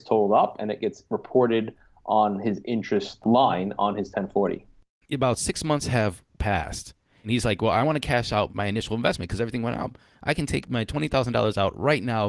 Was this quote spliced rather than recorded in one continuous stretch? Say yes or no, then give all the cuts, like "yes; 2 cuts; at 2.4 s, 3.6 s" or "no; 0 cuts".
yes; 1 cut; at 5.0 s